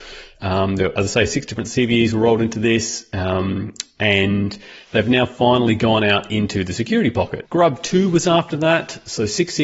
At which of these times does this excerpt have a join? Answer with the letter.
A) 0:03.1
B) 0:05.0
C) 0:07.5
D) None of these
C